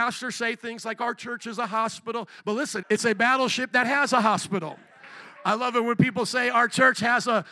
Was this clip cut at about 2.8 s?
yes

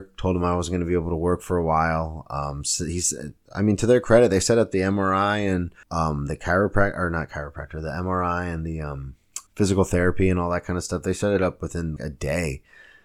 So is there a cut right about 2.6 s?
no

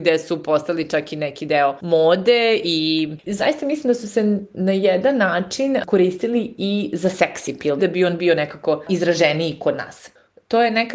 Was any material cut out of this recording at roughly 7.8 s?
yes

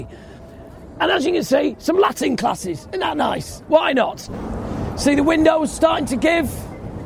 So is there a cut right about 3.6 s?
yes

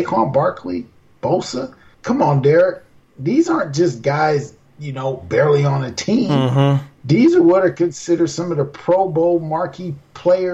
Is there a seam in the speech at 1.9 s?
yes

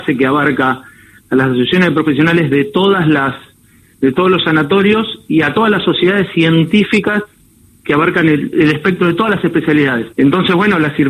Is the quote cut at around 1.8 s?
no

